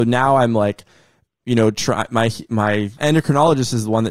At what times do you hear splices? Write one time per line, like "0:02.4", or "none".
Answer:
0:03.0